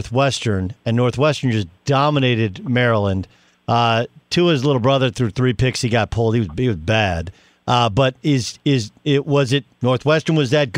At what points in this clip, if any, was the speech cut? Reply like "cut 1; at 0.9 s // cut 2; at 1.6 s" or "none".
none